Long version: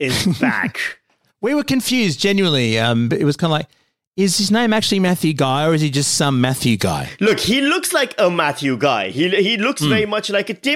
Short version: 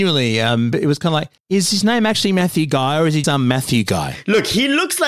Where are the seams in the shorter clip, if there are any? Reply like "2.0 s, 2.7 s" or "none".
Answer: 1.4 s, 3.2 s